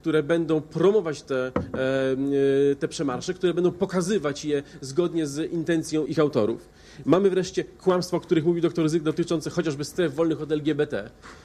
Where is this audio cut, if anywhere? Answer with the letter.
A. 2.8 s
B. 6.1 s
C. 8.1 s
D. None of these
B